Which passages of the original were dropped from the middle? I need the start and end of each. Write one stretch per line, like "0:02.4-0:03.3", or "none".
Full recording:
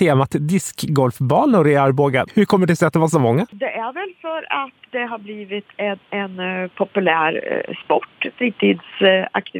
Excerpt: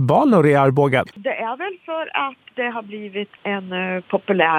0:02.3-0:03.5
0:05.7-0:06.0